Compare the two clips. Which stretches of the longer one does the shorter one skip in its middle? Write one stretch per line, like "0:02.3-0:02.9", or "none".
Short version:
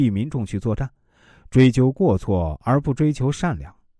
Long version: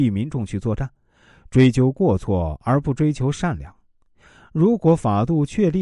none